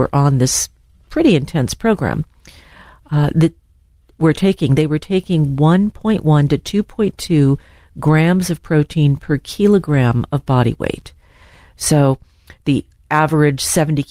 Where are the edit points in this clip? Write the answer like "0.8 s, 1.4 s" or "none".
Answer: none